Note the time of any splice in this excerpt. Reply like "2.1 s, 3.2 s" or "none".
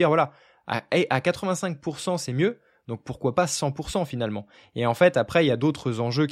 none